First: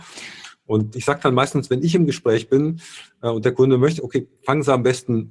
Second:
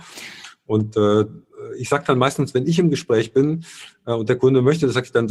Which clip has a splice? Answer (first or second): first